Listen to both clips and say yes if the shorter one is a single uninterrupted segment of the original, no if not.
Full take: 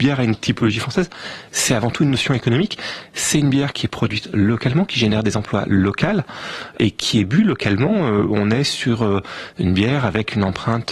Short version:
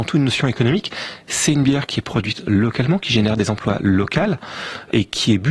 yes